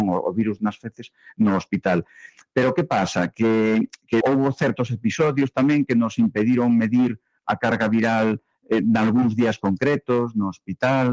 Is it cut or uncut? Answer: cut